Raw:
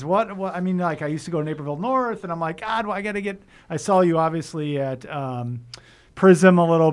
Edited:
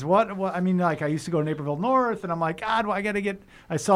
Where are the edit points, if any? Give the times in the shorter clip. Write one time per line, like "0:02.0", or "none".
none